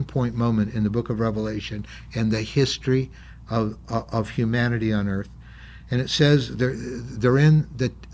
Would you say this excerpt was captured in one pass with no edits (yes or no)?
yes